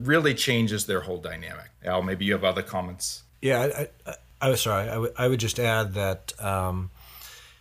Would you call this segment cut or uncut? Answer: uncut